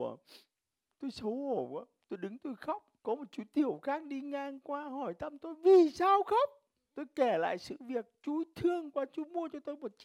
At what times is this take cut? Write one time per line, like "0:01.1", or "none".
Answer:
0:03.0